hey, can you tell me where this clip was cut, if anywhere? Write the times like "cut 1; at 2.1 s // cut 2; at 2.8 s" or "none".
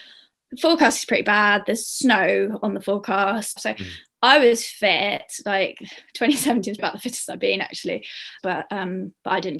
cut 1; at 3.6 s // cut 2; at 6.8 s // cut 3; at 8.4 s